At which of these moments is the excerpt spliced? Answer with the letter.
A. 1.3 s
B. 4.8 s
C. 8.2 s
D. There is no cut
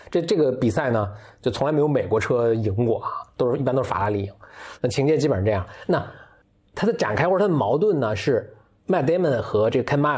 B